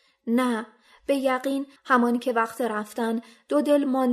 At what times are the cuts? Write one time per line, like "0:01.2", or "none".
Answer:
0:01.8